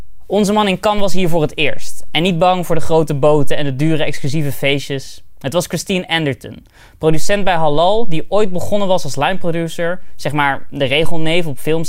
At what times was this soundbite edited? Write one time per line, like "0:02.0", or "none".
none